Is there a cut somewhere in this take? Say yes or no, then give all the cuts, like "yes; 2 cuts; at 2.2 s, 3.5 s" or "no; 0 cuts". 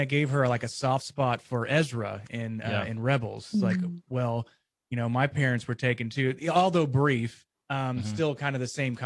no; 0 cuts